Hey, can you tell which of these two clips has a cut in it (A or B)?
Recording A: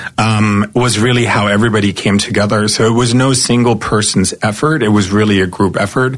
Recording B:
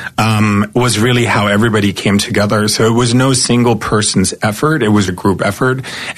B